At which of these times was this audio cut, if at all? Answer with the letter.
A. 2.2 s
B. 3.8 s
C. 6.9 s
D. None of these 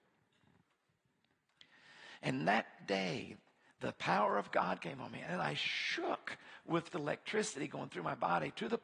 C